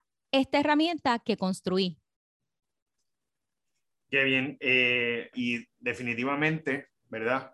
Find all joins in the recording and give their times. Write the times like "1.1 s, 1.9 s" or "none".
5.3 s